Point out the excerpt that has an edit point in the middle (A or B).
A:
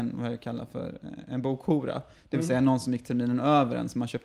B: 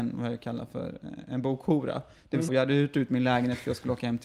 B